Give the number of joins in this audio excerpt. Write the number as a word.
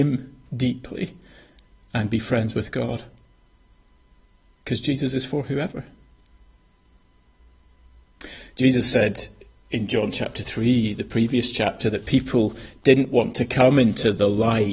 zero